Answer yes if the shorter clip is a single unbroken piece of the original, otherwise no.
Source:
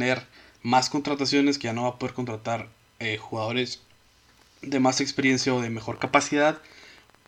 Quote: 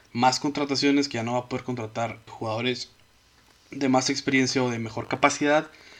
no